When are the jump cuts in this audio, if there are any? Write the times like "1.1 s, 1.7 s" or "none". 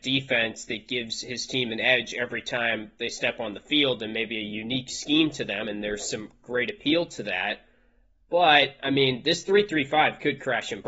none

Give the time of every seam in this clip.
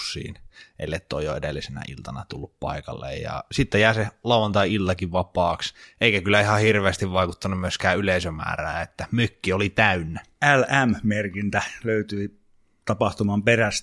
none

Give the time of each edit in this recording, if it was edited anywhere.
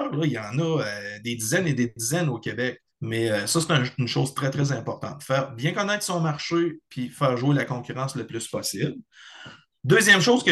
2.9 s

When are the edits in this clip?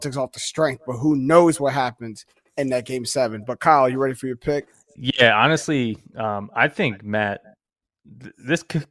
none

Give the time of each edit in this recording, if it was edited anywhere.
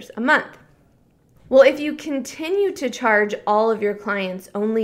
1.4 s

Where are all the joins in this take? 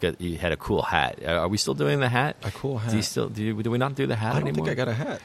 none

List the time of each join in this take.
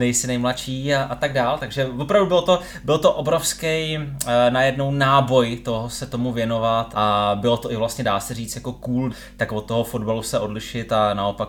6.9 s, 9.1 s

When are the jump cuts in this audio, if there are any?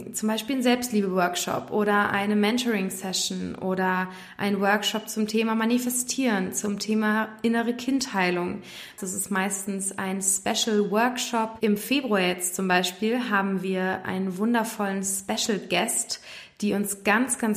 9.0 s

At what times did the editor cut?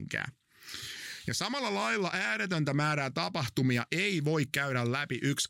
none

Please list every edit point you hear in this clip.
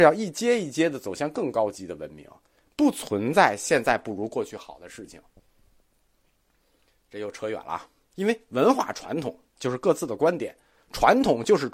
8.1 s, 9.6 s

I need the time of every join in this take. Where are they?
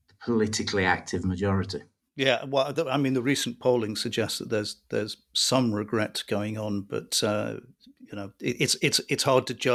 2.0 s

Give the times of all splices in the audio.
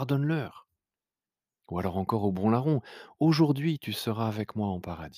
none

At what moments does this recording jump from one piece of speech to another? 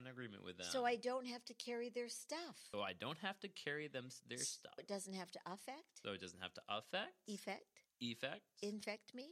2.7 s, 4.8 s, 6.0 s

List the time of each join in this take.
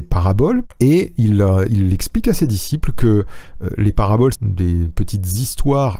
4.3 s

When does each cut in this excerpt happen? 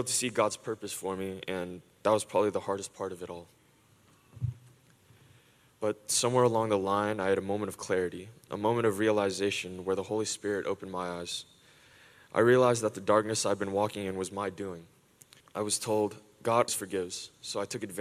15.4 s, 16.7 s

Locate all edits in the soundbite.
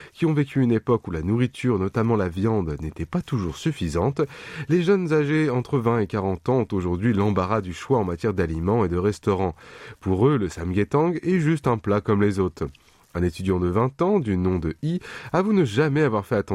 none

